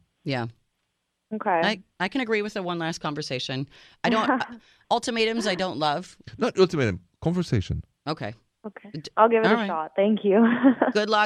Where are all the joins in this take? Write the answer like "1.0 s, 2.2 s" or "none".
none